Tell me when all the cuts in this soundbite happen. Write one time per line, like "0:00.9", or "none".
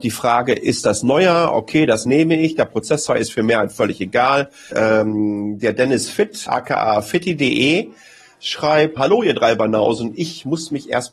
0:04.7
0:06.5
0:09.0